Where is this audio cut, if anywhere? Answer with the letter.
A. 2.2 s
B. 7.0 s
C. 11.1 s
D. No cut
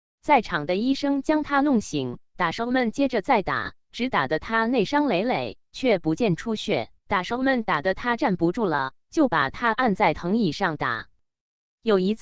B